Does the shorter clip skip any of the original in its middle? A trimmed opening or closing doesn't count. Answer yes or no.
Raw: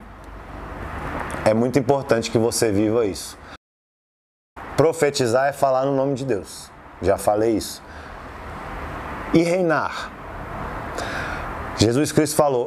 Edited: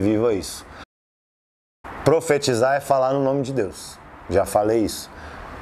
no